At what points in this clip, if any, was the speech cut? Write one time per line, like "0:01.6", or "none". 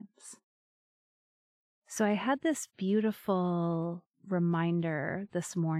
0:01.7
0:04.1